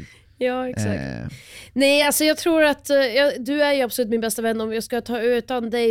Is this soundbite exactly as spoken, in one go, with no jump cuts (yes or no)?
yes